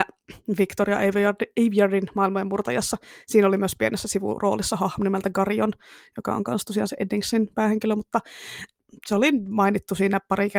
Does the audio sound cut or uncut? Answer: uncut